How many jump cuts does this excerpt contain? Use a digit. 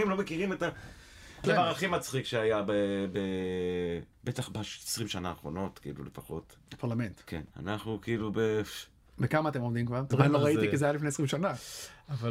3